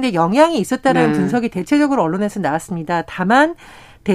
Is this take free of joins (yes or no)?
yes